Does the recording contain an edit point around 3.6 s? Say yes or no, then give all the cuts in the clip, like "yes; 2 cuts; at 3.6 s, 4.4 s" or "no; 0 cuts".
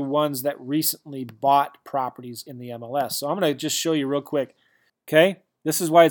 no; 1 cut; at 4.9 s